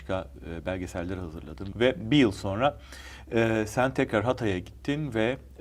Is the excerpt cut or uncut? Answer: cut